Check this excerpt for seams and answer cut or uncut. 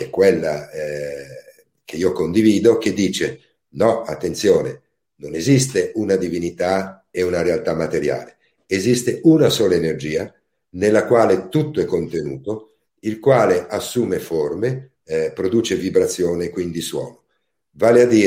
cut